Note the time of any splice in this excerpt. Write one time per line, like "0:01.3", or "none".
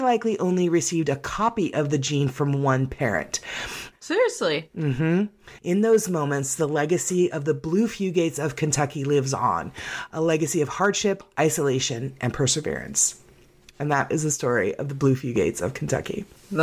0:03.9
0:05.6